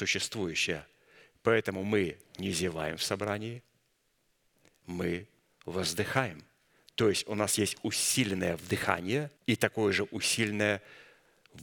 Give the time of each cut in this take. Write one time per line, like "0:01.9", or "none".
0:09.4

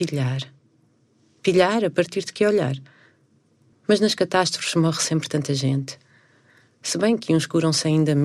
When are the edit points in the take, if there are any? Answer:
0:03.7

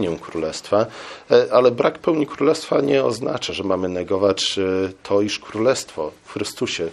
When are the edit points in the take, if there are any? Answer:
none

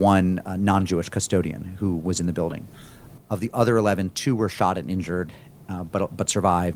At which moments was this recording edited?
0:03.2

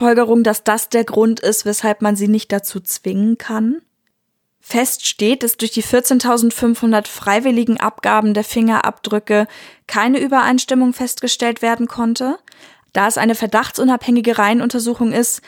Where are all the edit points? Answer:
0:12.9

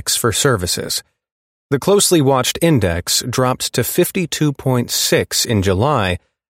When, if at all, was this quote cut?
none

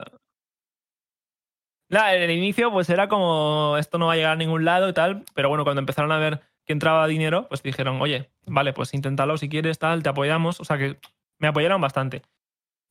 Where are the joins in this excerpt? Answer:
none

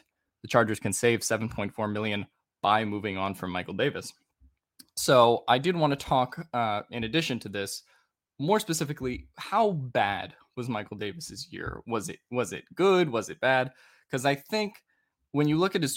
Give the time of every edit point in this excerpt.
none

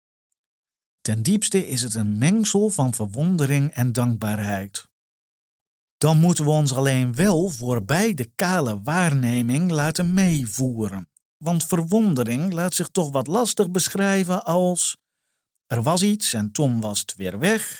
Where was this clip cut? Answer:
none

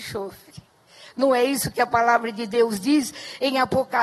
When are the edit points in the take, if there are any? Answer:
none

